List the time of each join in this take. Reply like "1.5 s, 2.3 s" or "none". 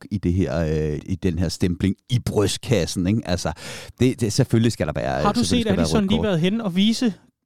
1.0 s